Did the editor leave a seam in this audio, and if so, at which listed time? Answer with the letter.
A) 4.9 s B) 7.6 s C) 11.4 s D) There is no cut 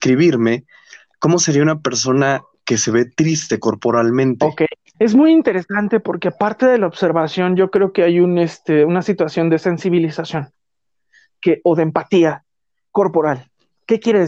A